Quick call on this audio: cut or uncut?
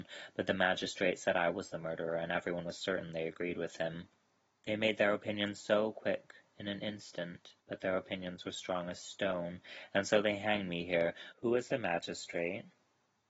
cut